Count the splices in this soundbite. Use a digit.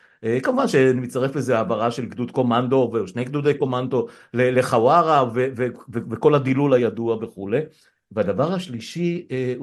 0